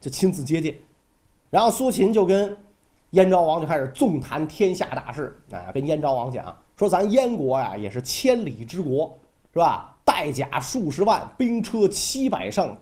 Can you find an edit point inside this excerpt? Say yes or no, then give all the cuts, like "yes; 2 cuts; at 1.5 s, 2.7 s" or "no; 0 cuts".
no; 0 cuts